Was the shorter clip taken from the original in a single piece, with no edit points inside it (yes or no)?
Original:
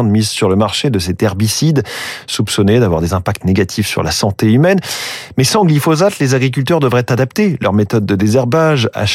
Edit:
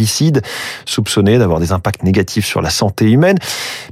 yes